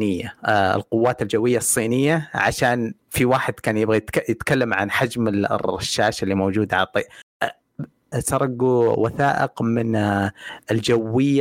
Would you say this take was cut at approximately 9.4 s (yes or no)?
no